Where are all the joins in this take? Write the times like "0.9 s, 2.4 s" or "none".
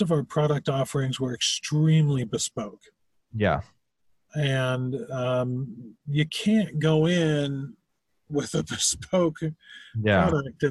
none